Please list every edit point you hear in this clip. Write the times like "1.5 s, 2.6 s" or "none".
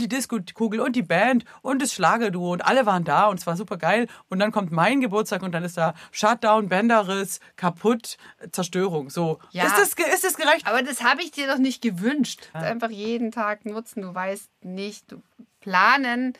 8.5 s, 10.6 s, 12.5 s